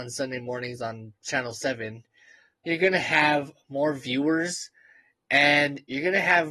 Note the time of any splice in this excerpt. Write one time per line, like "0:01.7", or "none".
0:02.7